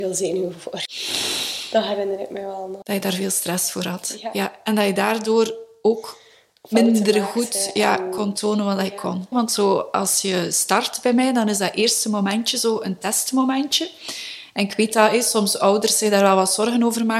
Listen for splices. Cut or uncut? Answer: cut